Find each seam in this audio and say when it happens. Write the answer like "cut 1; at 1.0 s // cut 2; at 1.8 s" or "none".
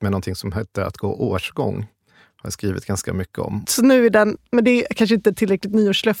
cut 1; at 3.6 s